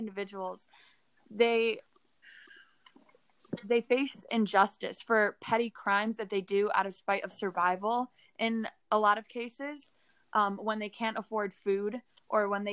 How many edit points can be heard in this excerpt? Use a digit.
0